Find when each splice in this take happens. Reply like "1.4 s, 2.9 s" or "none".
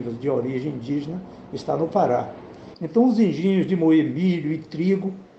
2.7 s

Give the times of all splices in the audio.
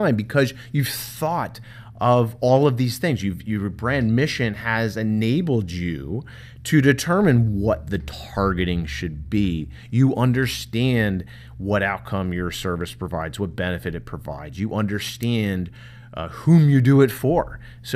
none

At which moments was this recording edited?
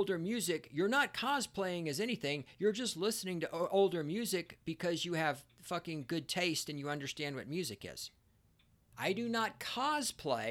8.9 s

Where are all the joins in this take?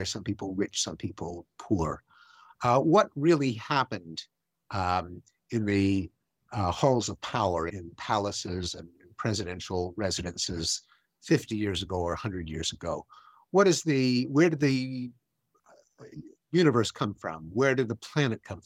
7.7 s

